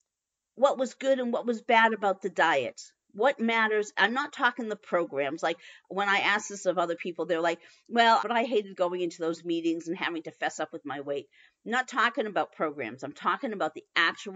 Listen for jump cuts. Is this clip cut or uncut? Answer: cut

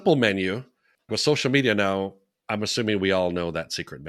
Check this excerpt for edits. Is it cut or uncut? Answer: cut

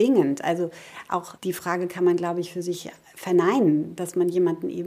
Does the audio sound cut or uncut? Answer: cut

